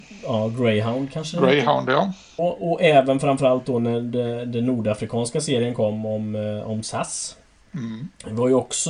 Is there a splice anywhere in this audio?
yes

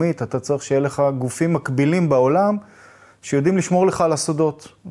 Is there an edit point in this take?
no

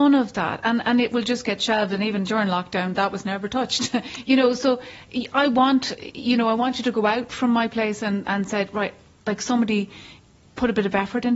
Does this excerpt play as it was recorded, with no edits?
yes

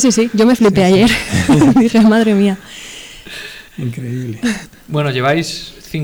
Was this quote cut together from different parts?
yes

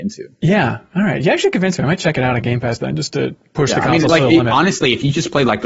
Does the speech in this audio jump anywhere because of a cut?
no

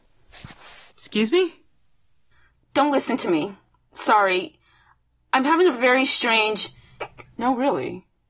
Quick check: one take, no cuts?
yes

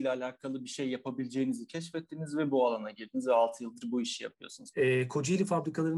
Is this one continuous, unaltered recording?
no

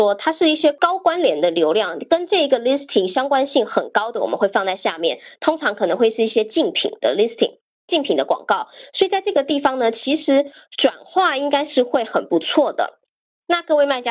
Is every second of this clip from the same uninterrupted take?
yes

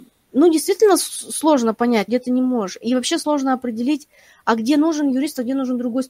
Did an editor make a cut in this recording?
yes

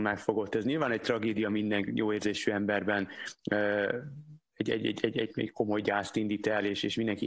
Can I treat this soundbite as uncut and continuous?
yes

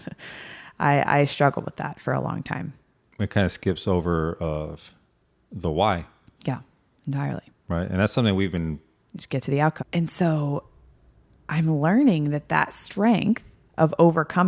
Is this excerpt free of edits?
no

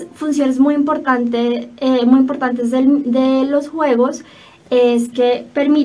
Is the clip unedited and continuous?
yes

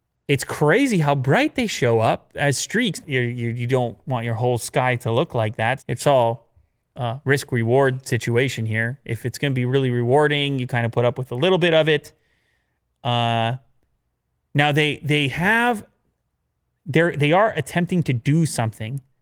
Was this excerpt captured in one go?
no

